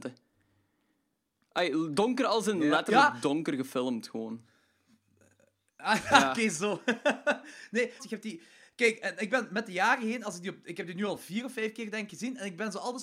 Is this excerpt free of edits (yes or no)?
no